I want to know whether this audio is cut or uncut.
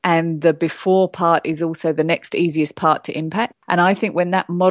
cut